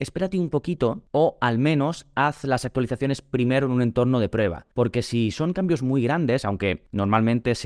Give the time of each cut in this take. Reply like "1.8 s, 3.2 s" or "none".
none